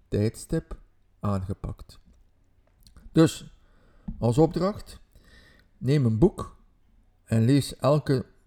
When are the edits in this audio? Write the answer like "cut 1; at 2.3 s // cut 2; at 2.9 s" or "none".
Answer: none